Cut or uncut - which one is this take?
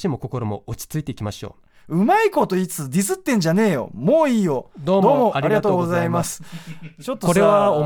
uncut